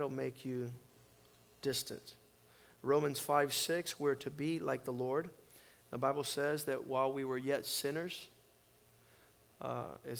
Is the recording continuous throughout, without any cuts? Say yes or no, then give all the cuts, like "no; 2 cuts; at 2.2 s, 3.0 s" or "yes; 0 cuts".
yes; 0 cuts